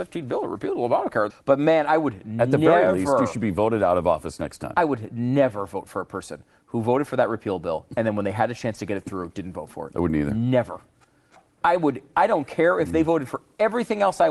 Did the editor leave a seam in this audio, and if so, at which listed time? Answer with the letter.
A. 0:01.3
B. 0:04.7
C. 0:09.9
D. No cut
A